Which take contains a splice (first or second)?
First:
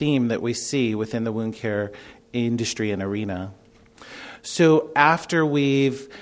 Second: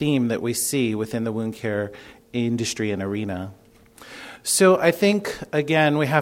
first